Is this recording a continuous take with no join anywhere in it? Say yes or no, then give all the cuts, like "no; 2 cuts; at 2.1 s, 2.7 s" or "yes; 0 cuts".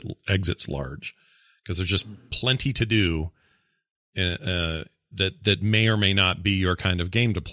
yes; 0 cuts